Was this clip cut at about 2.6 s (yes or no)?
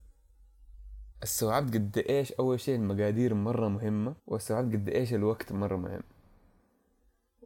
no